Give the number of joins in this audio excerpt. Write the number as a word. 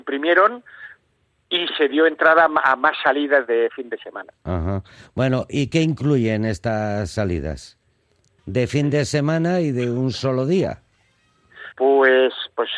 two